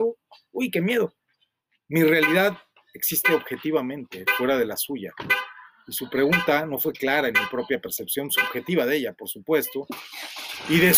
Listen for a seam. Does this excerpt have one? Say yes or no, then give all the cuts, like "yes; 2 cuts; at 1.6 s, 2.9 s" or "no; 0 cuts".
no; 0 cuts